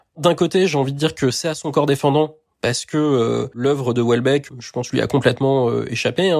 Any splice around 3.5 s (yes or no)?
no